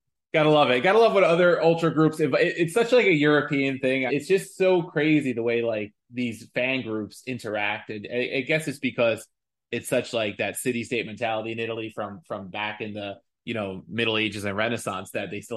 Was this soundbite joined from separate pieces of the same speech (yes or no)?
yes